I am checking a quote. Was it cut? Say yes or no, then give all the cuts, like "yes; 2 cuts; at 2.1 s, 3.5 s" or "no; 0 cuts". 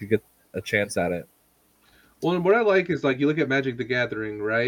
no; 0 cuts